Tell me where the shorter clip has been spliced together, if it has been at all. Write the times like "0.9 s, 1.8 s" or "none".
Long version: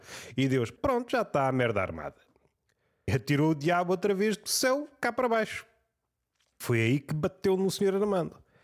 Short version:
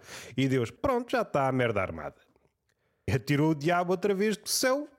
none